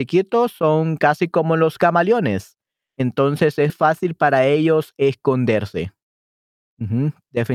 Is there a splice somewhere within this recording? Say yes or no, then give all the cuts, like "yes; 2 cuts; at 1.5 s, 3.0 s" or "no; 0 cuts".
yes; 1 cut; at 3.7 s